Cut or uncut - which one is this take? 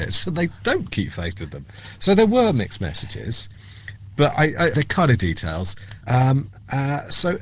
cut